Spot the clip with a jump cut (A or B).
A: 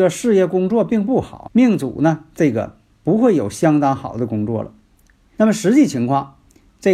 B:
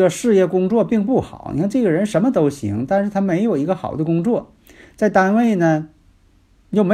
A